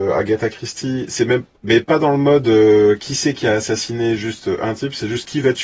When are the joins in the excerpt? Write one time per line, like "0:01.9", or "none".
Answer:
none

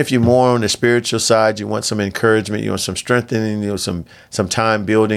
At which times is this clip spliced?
none

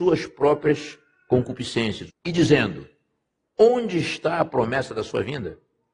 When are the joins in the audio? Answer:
0:02.1

